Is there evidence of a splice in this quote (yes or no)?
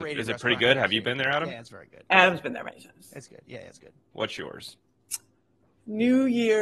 yes